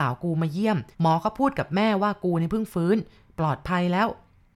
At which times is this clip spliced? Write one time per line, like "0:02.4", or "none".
0:00.9